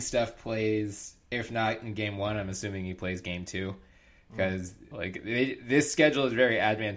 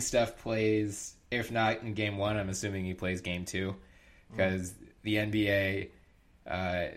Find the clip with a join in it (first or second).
first